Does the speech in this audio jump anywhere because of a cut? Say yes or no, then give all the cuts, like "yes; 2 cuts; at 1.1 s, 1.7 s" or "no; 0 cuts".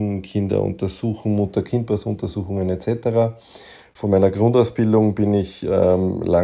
no; 0 cuts